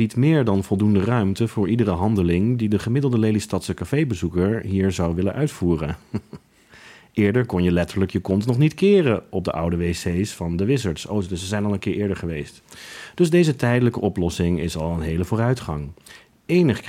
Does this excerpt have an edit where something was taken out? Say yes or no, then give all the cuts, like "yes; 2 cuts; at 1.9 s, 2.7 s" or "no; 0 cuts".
no; 0 cuts